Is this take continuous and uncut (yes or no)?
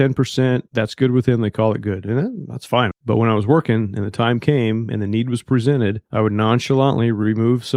no